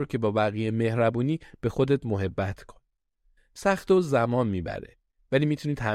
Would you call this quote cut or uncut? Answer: uncut